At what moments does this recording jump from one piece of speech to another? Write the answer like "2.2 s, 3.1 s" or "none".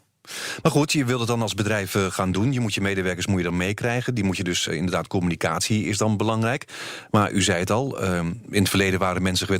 4.7 s, 8.5 s

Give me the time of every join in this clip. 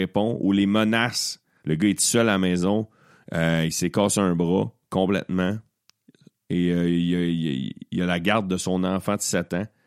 1.6 s

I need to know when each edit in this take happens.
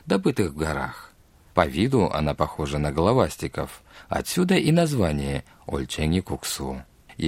1.5 s

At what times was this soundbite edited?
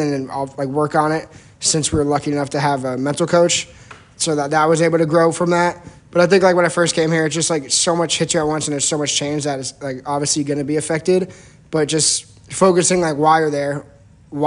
none

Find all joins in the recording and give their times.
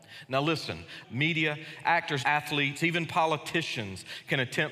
1.0 s, 2.2 s

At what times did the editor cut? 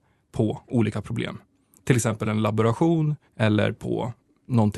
3.3 s

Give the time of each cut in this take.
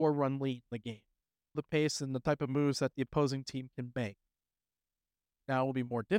1.5 s

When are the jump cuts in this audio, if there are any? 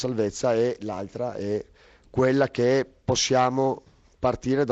none

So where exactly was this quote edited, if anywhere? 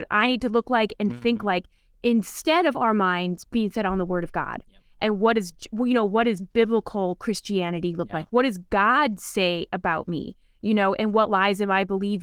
none

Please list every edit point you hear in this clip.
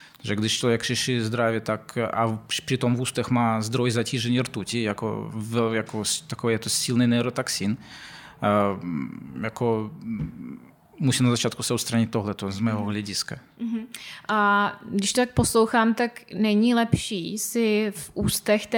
none

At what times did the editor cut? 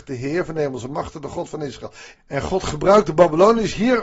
2.2 s

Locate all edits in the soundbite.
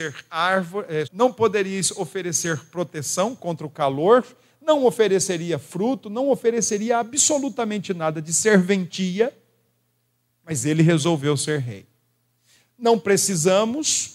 1.0 s

